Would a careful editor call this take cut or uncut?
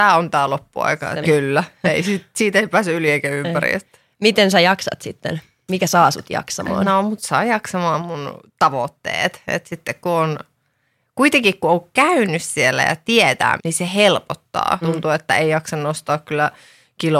cut